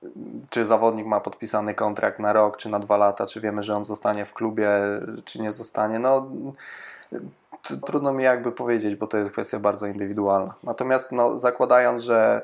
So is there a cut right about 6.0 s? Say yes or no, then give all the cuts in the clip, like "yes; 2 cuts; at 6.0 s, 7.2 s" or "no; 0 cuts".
no; 1 cut; at 7.8 s